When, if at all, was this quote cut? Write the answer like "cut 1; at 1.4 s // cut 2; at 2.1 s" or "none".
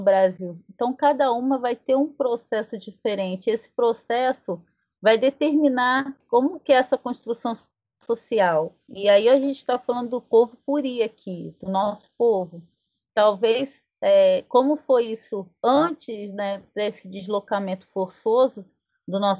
cut 1; at 6.2 s